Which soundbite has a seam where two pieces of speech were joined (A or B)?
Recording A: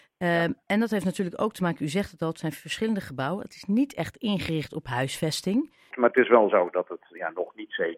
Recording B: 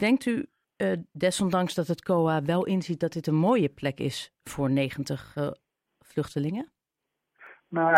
A